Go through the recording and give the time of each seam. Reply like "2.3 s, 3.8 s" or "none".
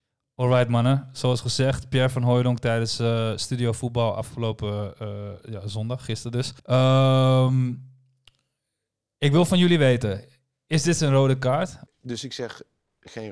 6.6 s, 11.9 s

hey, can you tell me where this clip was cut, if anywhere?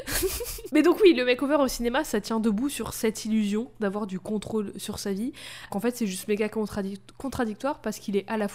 5.7 s

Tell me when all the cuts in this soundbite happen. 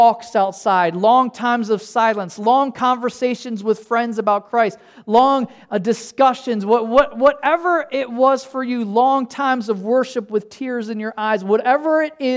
none

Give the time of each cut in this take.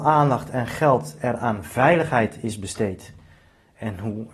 none

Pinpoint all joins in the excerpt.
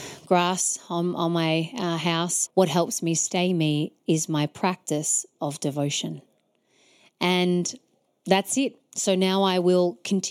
2.5 s

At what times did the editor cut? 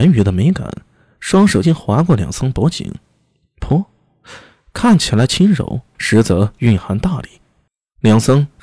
1.6 s

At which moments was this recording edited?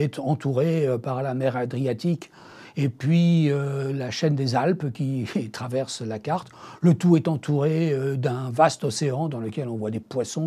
none

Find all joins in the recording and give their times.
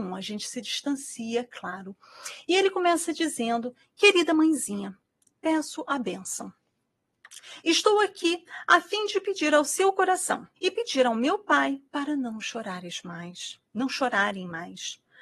10.6 s

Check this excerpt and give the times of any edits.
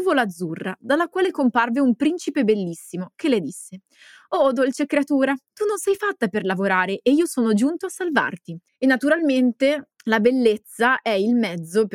8.7 s, 10.0 s

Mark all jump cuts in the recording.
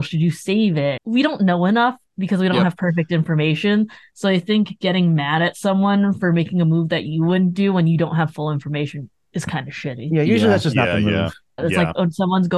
1.0 s, 11.6 s

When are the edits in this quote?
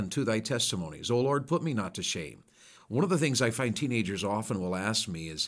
2.7 s

